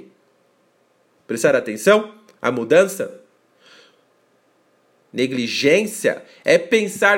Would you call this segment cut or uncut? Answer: cut